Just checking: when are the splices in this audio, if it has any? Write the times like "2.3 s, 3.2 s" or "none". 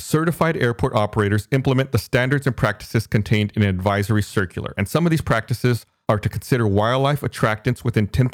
none